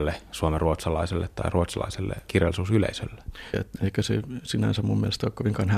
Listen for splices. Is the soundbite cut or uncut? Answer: cut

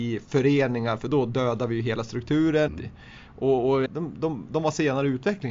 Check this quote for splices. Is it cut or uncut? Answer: cut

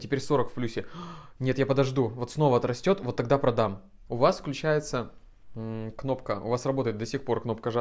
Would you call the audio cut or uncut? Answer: cut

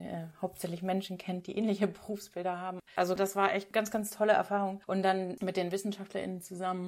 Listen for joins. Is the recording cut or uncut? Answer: uncut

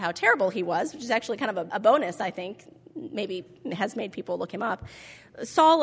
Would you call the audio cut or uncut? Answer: cut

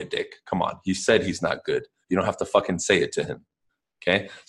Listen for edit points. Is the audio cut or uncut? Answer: uncut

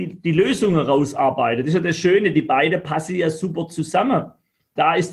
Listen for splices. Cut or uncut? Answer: uncut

